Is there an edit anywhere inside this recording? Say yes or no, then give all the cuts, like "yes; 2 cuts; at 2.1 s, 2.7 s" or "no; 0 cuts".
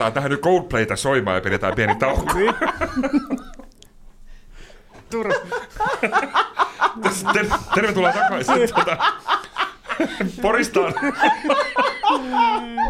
yes; 1 cut; at 5.1 s